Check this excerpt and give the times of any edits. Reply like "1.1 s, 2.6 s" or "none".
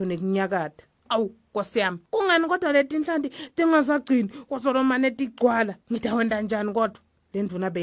2.1 s, 5.8 s